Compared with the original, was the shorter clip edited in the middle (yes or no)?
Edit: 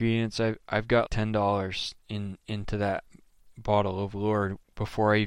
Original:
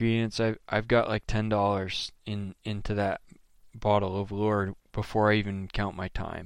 yes